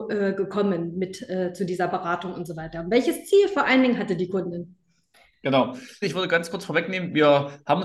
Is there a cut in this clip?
yes; 1 cut; at 6.0 s

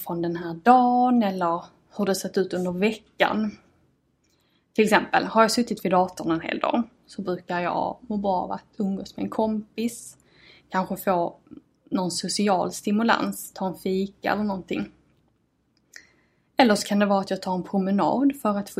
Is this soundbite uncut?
yes; 0 cuts

